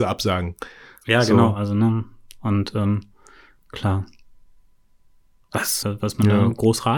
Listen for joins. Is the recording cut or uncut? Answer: cut